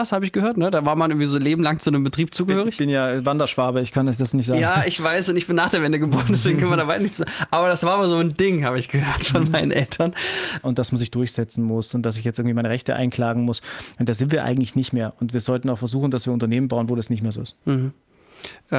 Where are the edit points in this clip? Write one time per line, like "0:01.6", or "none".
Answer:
0:10.6